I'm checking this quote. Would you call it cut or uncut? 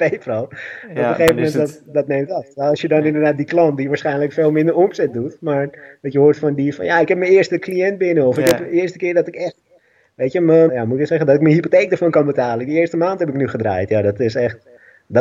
cut